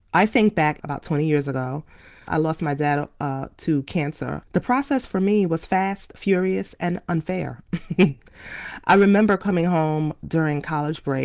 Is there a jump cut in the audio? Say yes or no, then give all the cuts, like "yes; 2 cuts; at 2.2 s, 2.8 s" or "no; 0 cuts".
no; 0 cuts